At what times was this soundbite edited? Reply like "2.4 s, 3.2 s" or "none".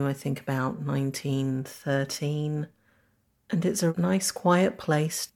none